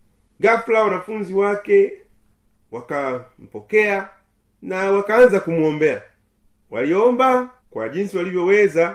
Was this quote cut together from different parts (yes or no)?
yes